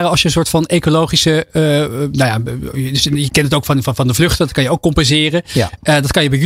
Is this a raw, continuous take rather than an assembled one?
yes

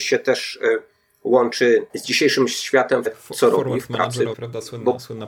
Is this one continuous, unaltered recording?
no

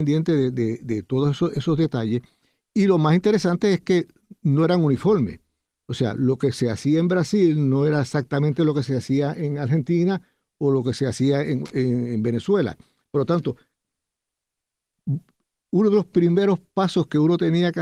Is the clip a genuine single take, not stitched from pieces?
yes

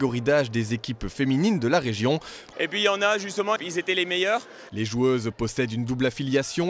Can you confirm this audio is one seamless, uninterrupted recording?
no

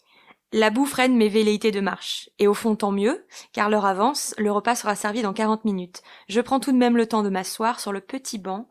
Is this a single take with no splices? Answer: yes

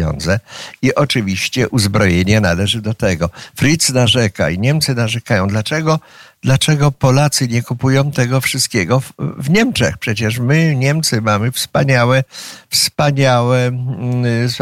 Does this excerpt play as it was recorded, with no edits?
yes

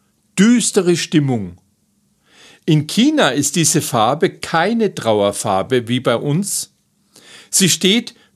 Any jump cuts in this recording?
no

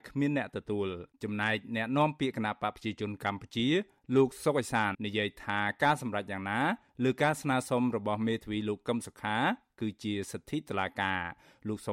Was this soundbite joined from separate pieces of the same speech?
yes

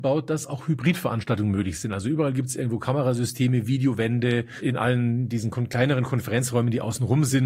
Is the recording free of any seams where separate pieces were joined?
yes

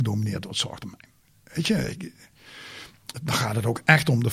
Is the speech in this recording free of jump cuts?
yes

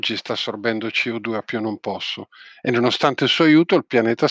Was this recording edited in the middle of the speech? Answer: no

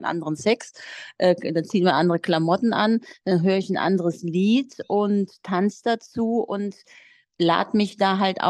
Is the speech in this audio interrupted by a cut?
no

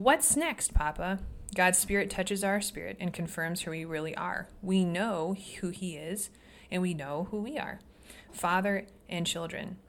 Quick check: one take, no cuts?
yes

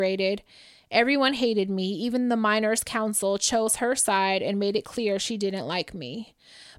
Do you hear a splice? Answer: no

